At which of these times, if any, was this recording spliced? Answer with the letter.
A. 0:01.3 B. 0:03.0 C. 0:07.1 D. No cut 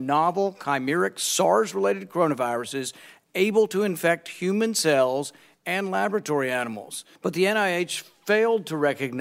C